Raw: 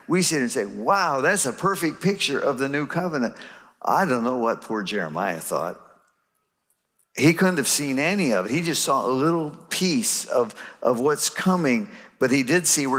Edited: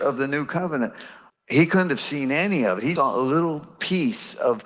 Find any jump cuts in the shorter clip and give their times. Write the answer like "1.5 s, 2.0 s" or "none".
1.3 s, 3.0 s